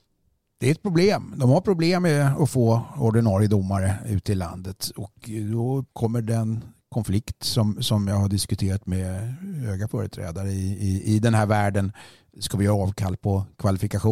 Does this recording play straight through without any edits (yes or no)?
no